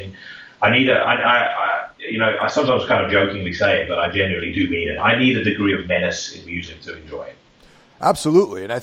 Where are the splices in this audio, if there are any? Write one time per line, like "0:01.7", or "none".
none